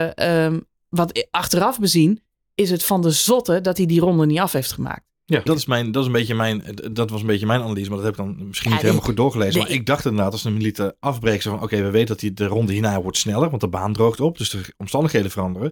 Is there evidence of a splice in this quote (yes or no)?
yes